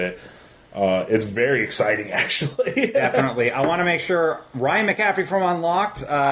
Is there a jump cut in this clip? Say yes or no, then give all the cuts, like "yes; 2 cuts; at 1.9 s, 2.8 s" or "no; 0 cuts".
no; 0 cuts